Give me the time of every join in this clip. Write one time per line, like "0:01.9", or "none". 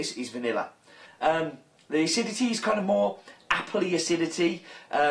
0:01.1